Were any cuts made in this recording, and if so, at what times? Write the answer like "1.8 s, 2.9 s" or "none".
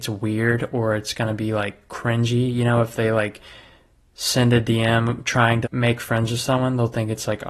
5.6 s

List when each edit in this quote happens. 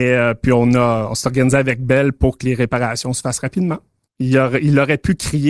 4.1 s

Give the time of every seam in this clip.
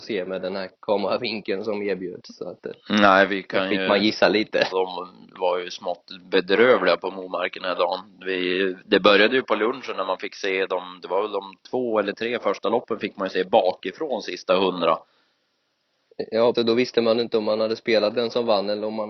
4.7 s, 16.5 s

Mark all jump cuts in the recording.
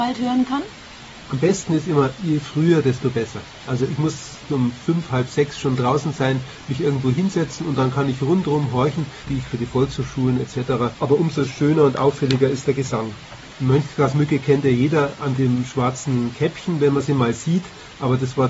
9.3 s, 10.9 s, 13.5 s

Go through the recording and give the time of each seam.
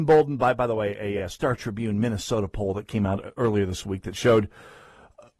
none

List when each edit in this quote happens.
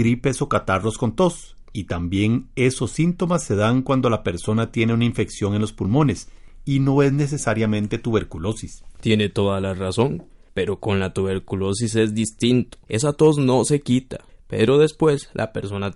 12.9 s, 14.3 s

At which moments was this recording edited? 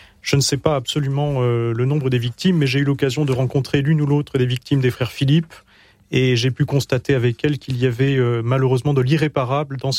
none

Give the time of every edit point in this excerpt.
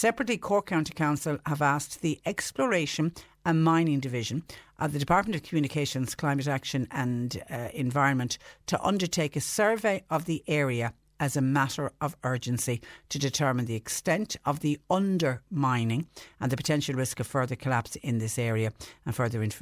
none

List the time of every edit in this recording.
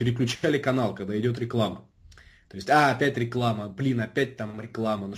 none

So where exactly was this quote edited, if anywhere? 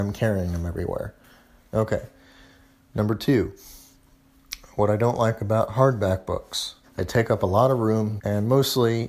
1.7 s, 6.8 s, 8.2 s

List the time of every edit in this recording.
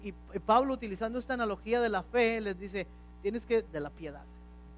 3.6 s

